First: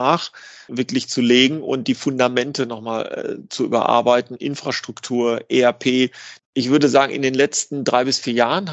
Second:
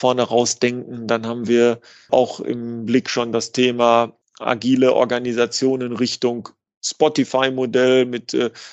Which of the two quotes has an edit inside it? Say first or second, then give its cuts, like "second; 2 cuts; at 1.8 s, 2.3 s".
first; 2 cuts; at 4.4 s, 6.4 s